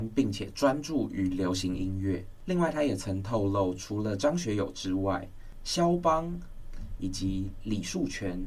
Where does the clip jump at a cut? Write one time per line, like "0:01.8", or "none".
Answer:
none

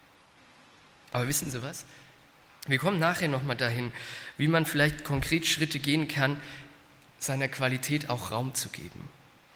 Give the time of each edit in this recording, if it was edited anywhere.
0:02.5

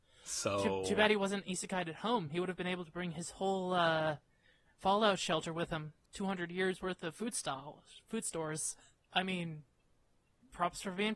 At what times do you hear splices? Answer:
0:06.1
0:09.0

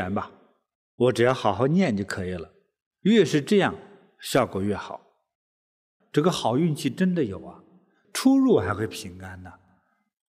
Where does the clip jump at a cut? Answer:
0:06.0
0:08.0

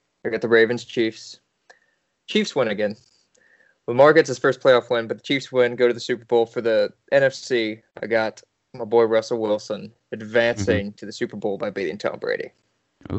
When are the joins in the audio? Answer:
0:07.9

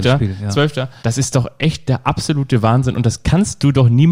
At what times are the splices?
0:01.0

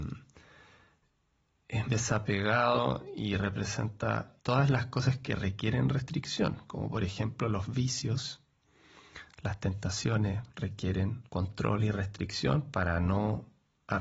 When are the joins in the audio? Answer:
0:01.9
0:04.4
0:11.3

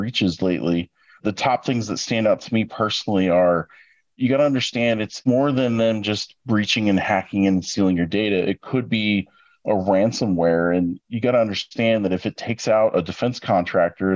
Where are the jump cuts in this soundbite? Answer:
none

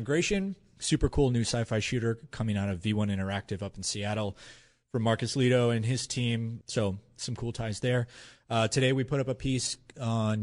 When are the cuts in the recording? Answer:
0:06.6

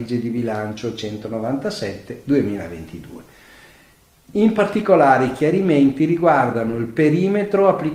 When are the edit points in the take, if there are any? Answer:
none

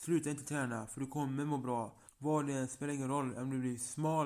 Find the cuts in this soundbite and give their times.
0:02.1

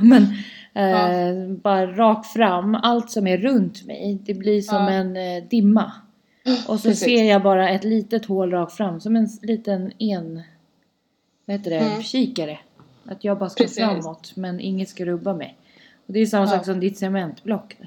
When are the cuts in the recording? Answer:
none

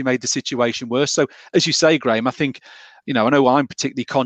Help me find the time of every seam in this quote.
none

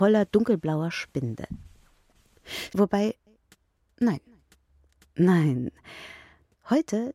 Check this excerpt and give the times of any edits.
0:02.7

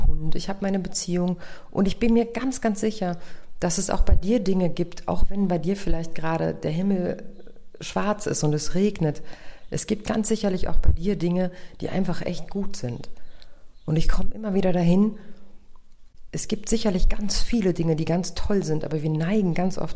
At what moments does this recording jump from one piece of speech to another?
none

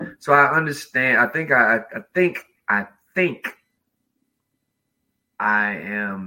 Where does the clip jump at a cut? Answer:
none

